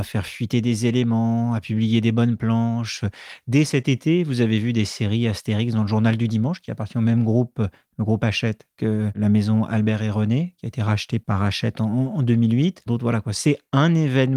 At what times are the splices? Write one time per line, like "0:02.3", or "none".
none